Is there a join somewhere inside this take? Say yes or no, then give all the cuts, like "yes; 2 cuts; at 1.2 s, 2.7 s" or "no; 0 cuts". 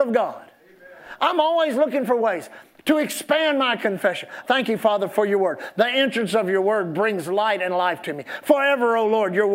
yes; 1 cut; at 4.4 s